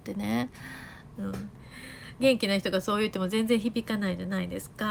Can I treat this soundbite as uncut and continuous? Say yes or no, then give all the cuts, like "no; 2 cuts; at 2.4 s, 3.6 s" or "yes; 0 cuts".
no; 1 cut; at 1.2 s